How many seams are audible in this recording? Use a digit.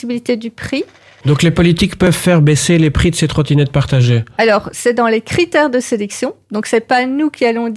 1